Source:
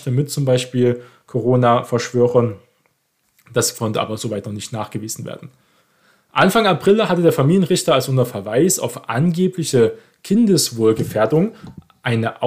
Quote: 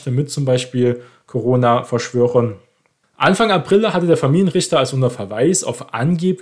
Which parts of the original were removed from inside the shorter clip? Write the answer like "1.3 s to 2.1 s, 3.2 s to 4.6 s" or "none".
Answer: 3.0 s to 6.2 s